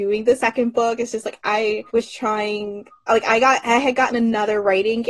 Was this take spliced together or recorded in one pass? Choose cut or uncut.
cut